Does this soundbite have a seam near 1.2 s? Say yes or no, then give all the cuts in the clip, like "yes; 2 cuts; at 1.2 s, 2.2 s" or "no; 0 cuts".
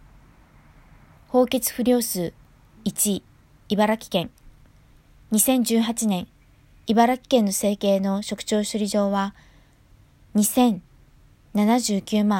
yes; 1 cut; at 1.2 s